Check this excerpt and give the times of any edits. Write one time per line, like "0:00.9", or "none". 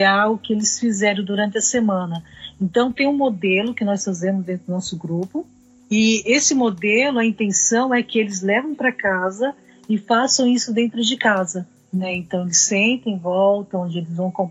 none